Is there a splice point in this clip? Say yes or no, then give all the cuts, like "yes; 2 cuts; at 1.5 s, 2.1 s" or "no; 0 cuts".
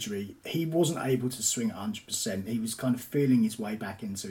no; 0 cuts